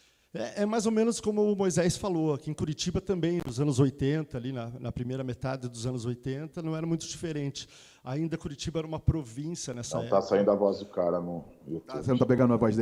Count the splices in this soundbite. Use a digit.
0